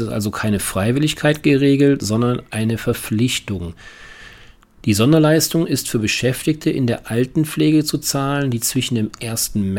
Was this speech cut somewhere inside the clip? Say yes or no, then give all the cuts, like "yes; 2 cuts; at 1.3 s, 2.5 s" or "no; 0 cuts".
no; 0 cuts